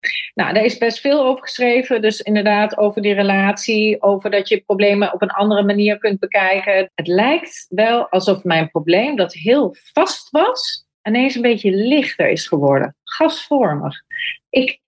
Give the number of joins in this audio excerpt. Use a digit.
1